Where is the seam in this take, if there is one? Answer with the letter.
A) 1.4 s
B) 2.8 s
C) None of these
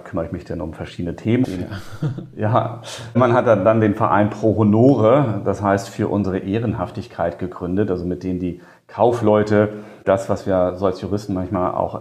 A